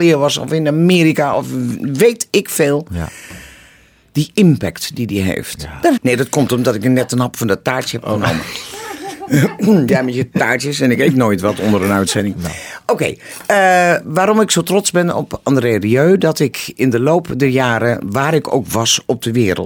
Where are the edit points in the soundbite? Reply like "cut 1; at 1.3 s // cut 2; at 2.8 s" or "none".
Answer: cut 1; at 6.0 s